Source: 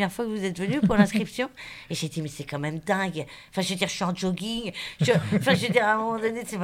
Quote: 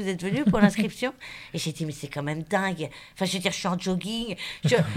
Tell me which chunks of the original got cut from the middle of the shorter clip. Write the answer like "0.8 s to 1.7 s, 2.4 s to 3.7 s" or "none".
none